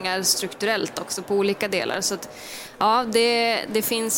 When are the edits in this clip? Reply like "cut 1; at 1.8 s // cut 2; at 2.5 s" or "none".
none